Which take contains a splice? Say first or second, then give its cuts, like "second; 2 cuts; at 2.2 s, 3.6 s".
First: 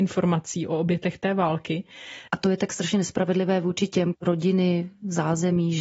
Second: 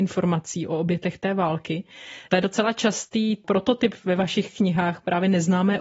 first; 2 cuts; at 2.3 s, 4.1 s